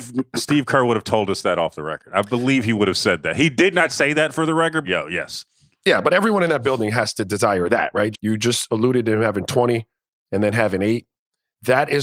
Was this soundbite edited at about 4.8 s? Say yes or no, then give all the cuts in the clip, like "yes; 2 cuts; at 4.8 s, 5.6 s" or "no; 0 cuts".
yes; 2 cuts; at 4.8 s, 8.1 s